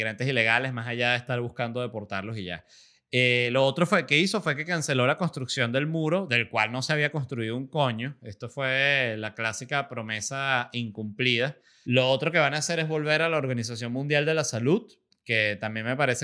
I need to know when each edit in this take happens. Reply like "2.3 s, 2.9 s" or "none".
11.8 s